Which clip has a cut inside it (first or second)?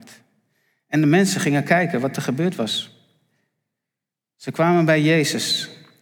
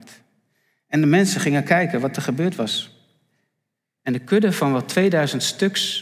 second